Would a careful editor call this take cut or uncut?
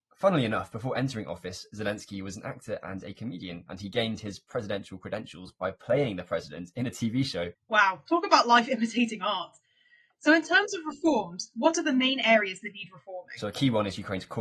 uncut